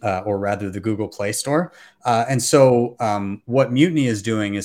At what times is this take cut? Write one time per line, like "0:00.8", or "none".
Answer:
none